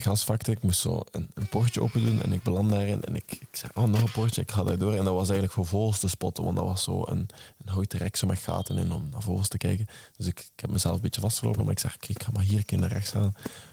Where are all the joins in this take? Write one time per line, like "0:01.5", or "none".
none